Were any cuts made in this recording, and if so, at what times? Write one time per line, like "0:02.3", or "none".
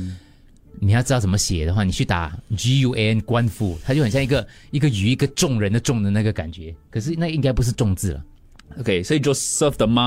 none